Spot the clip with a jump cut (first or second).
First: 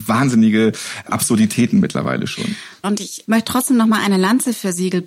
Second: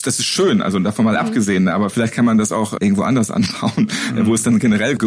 first